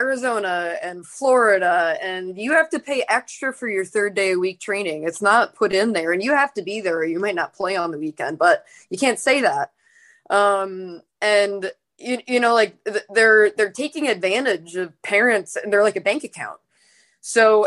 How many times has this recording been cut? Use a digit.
0